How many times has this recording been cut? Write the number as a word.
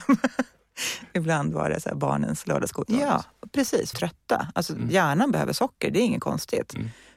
two